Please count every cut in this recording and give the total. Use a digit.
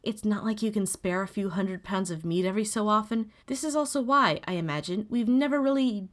1